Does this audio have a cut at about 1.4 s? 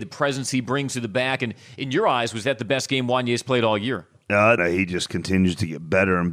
no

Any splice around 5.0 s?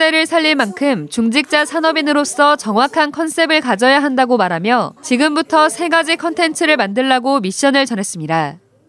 yes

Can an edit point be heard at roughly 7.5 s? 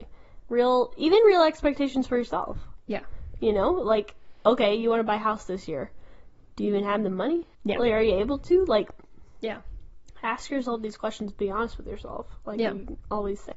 yes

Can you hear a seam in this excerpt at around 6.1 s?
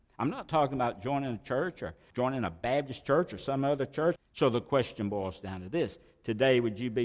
no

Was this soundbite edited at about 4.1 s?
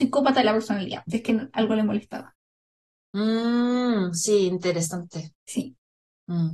no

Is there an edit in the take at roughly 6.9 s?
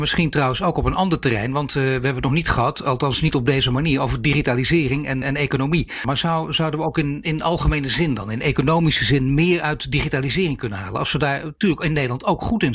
no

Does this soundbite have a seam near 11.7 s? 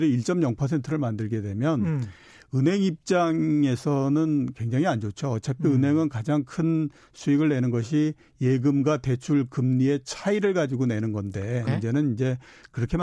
yes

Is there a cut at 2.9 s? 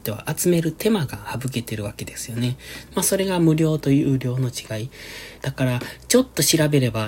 yes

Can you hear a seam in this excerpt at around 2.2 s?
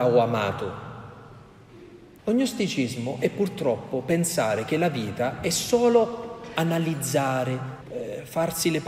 yes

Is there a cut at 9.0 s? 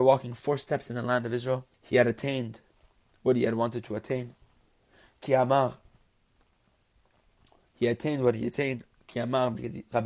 no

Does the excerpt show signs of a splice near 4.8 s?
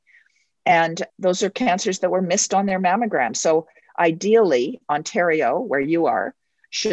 no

